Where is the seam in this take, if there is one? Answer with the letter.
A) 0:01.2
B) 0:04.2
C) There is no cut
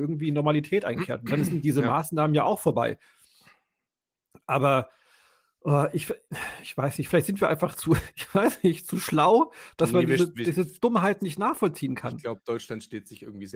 C